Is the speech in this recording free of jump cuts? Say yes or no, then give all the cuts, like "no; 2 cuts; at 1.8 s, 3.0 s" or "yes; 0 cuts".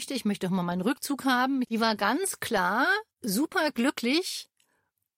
no; 2 cuts; at 1.6 s, 3.1 s